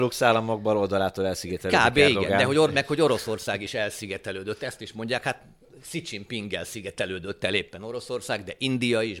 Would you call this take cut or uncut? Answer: uncut